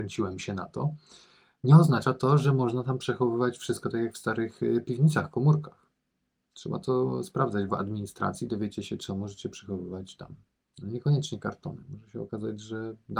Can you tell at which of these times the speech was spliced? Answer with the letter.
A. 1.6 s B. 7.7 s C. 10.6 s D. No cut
B